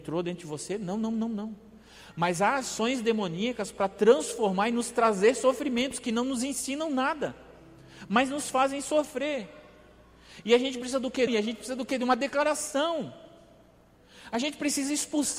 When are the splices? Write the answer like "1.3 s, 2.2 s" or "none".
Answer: 11.3 s